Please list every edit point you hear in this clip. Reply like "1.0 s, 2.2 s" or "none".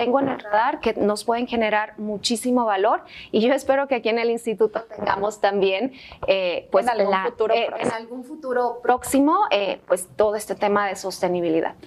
none